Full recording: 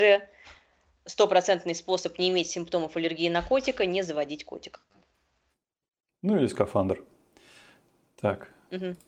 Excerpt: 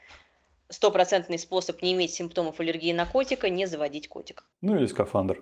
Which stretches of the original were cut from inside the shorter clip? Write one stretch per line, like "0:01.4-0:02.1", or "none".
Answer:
0:04.9-0:06.1